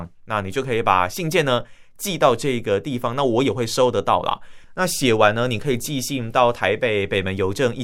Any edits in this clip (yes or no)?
yes